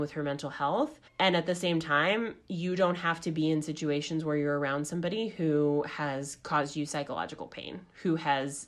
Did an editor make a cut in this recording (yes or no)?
yes